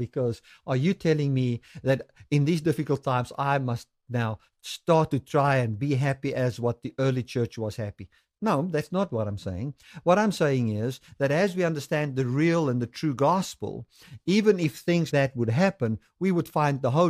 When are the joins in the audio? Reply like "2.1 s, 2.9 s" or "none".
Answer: 15.1 s